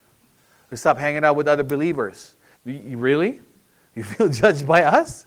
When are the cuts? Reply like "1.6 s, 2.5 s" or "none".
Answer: 2.6 s